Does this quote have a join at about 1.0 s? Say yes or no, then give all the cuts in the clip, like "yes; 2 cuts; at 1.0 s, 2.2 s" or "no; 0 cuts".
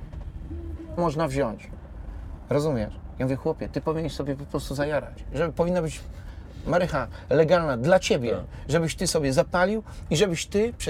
yes; 1 cut; at 1.0 s